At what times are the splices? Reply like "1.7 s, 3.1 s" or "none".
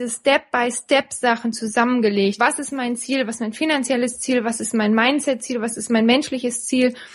2.4 s